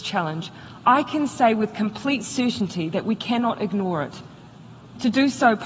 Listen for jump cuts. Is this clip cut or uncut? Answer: uncut